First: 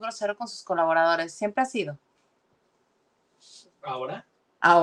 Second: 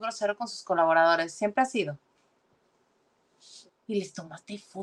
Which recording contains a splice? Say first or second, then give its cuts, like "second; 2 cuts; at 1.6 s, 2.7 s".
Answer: second; 1 cut; at 3.7 s